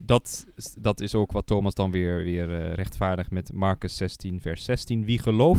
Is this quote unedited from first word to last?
yes; 0 cuts

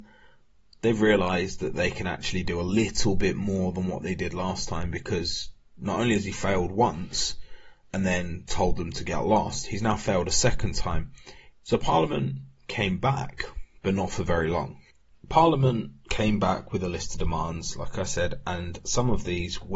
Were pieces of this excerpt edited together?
yes; 2 cuts; at 11.5 s, 15.1 s

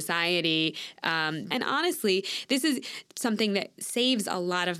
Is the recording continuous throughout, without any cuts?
yes; 0 cuts

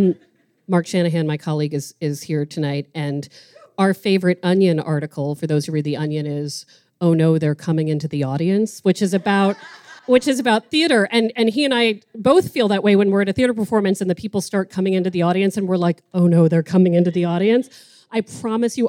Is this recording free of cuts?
no; 1 cut; at 10.0 s

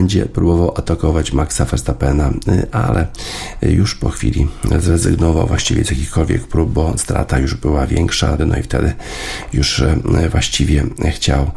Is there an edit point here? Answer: yes; 1 cut; at 8.4 s

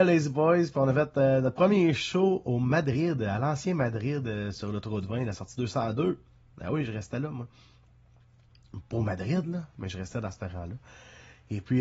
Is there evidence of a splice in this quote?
no; 0 cuts

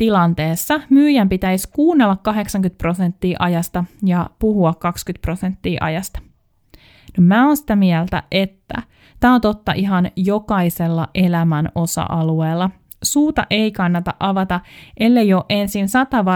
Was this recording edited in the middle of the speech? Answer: no; 0 cuts

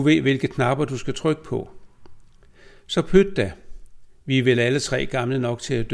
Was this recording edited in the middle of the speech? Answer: no; 0 cuts

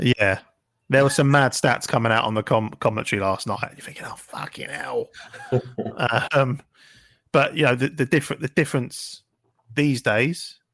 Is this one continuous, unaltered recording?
yes; 0 cuts

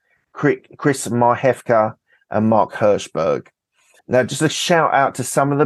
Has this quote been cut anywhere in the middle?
yes; 1 cut; at 4.0 s

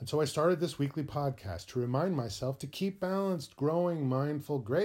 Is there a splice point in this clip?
no; 0 cuts

